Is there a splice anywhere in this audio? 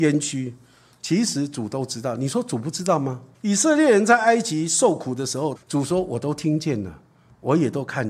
yes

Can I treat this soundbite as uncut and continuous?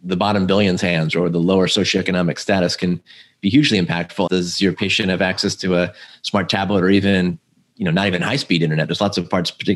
no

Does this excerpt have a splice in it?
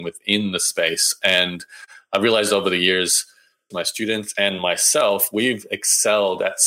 yes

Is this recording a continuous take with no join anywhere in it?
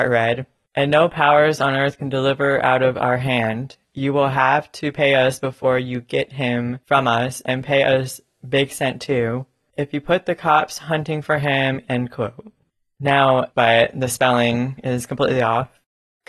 no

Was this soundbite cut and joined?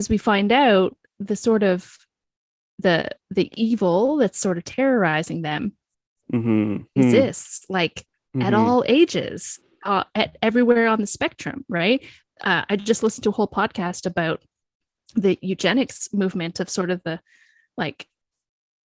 yes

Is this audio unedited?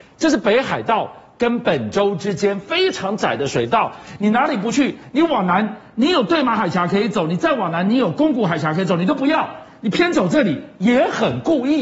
yes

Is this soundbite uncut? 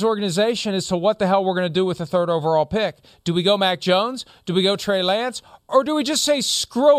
yes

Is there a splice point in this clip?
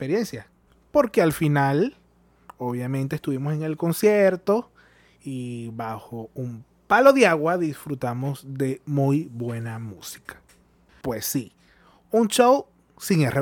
yes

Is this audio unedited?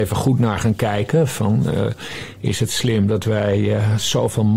yes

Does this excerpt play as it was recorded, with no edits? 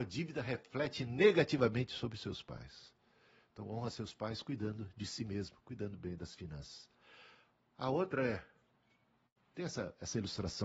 yes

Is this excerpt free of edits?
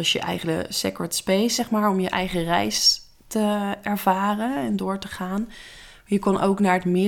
yes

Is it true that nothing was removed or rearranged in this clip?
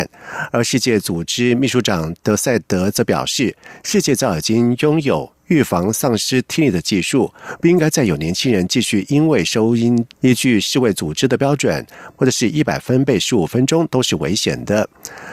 no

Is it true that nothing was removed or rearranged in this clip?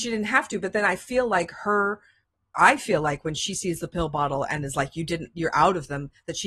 yes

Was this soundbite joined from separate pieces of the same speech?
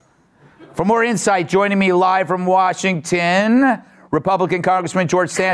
no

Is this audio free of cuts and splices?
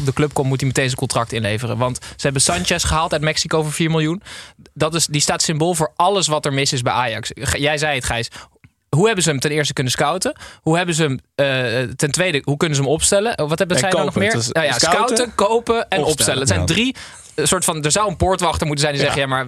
yes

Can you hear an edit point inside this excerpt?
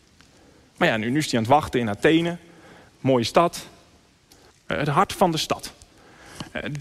yes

